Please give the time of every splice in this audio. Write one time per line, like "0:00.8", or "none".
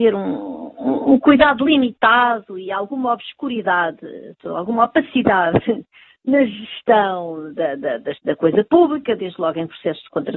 none